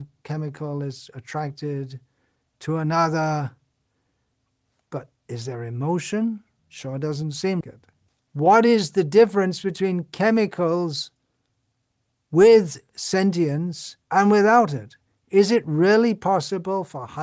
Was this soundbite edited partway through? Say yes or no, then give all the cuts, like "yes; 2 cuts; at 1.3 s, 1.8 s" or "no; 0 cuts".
yes; 3 cuts; at 6.6 s, 7.6 s, 14.0 s